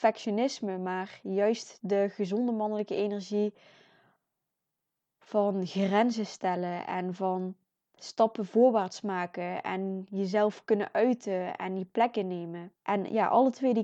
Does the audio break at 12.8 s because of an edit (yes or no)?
yes